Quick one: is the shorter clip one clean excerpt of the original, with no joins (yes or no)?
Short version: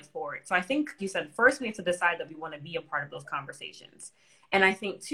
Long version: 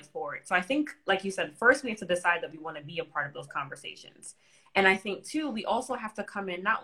no